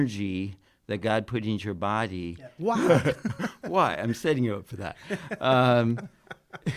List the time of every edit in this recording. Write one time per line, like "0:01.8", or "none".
0:02.6